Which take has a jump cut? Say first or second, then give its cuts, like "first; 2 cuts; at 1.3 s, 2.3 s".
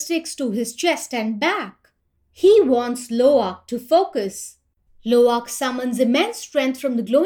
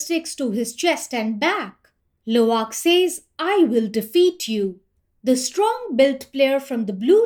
first; 2 cuts; at 2.2 s, 4.9 s